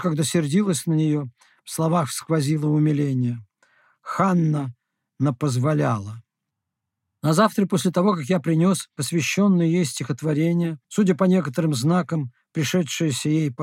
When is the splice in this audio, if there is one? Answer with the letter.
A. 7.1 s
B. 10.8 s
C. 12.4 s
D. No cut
B